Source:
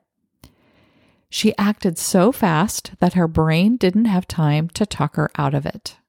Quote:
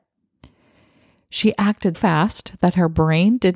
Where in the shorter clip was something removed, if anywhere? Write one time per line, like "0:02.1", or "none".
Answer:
0:01.9